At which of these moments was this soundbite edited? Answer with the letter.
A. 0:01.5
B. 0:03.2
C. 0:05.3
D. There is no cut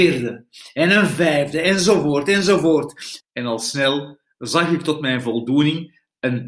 B